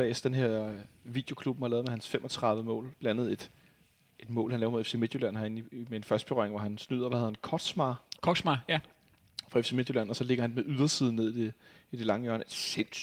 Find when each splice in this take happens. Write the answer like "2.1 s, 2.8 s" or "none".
none